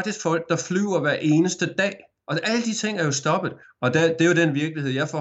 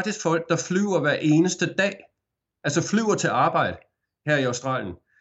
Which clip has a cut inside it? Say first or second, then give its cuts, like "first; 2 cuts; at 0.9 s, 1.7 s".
first; 2 cuts; at 2.2 s, 3.6 s